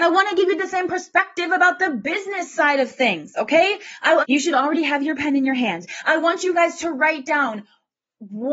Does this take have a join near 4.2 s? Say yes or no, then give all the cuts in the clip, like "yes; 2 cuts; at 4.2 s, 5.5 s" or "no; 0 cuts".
yes; 1 cut; at 4.2 s